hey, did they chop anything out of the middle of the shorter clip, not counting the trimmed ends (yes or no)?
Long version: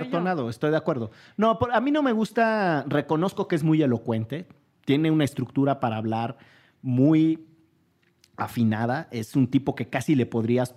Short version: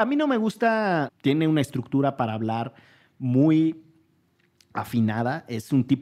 yes